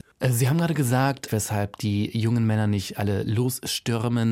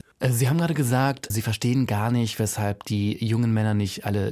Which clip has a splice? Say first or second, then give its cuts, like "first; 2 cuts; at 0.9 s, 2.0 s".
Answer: first; 1 cut; at 1.3 s